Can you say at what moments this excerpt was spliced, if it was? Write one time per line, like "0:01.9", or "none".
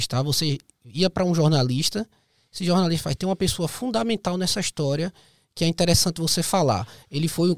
none